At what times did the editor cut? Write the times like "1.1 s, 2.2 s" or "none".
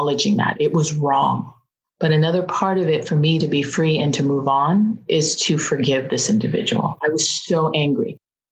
3.4 s